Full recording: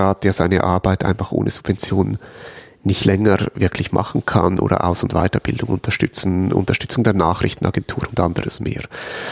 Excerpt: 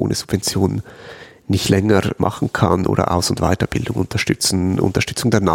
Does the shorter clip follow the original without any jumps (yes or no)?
no